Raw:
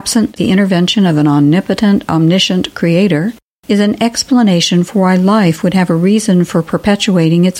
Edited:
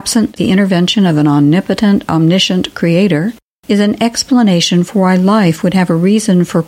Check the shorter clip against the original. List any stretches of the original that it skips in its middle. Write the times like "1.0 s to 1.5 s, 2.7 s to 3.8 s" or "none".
none

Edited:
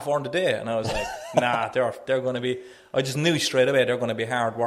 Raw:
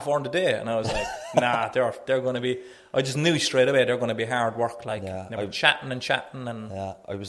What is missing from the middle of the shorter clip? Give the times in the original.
none

